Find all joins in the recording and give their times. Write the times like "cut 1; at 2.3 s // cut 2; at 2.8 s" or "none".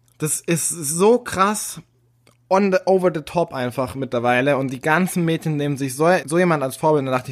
cut 1; at 6.2 s